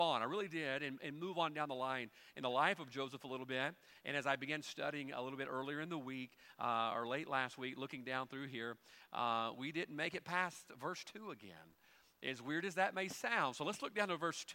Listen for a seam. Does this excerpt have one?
no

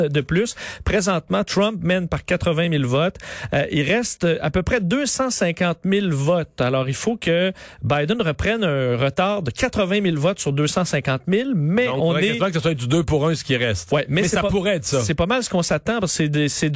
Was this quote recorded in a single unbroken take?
yes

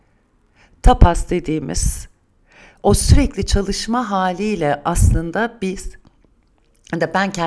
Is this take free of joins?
yes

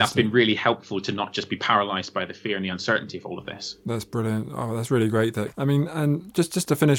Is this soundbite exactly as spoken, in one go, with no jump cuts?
no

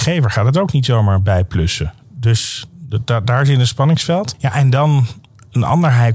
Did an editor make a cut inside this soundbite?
no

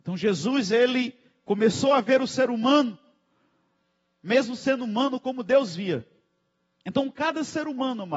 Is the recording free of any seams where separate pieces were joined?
yes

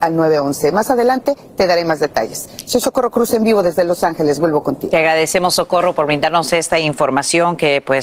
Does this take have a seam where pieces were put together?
no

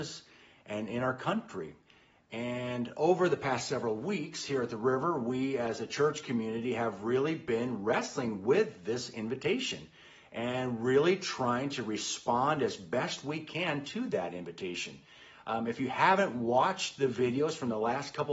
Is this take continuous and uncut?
yes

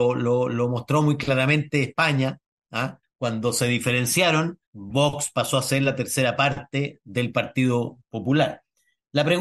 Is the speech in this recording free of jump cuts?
no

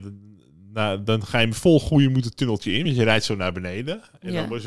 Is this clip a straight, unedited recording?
yes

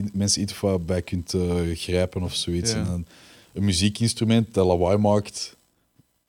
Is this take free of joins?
yes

